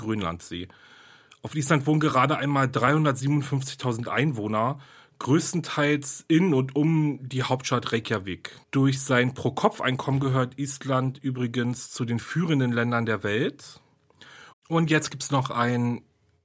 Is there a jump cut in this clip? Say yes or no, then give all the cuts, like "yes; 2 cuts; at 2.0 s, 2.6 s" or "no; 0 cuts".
yes; 2 cuts; at 8.6 s, 14.5 s